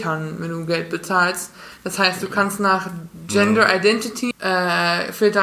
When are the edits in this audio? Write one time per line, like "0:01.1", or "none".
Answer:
0:04.3